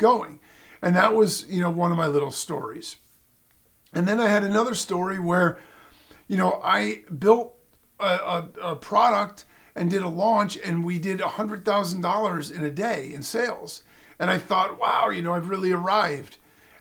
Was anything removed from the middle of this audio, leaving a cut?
no; 0 cuts

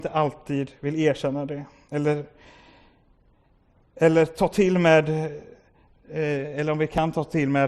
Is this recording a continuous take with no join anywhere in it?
yes; 0 cuts

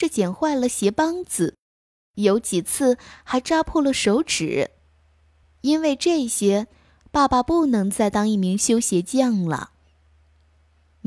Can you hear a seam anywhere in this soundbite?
no; 0 cuts

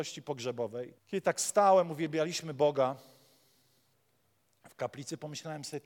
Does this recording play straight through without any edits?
no; 1 cut; at 1.0 s

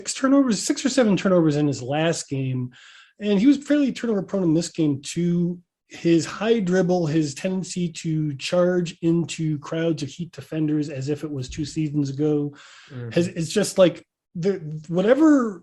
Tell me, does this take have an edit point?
no; 0 cuts

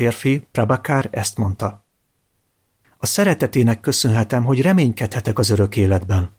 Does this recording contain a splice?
yes; 1 cut; at 2.8 s

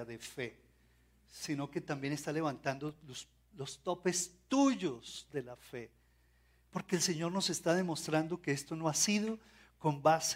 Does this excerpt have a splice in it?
no; 0 cuts

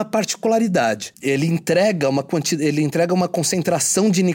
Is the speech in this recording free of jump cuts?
yes; 0 cuts

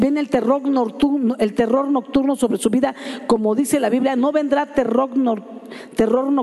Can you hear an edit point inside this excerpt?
no; 0 cuts

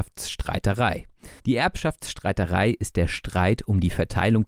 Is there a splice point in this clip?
yes; 1 cut; at 1.4 s

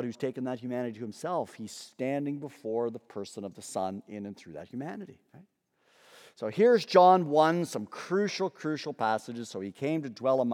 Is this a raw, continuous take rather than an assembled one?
yes; 0 cuts

